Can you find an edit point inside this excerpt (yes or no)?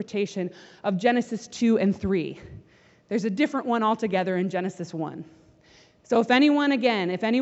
no